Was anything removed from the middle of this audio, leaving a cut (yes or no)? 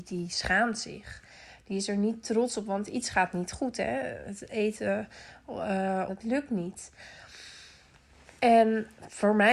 yes